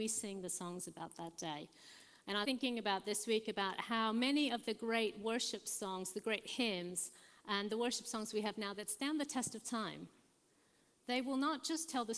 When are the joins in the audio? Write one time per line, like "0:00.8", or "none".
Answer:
0:02.4

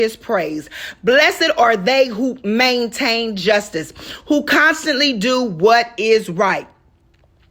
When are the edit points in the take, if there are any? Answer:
none

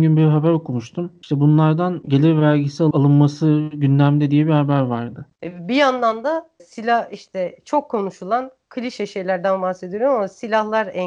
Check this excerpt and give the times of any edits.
0:01.2
0:05.3

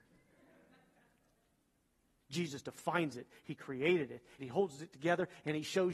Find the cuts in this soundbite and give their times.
0:02.2
0:04.4

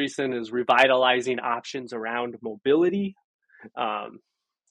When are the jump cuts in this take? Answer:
none

